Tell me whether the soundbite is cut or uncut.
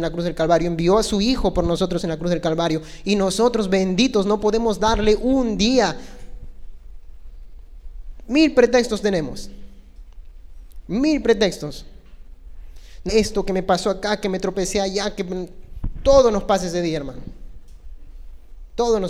cut